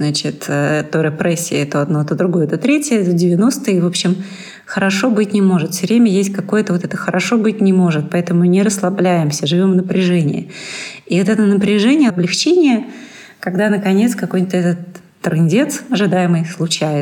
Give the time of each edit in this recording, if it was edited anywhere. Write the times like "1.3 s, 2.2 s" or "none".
12.1 s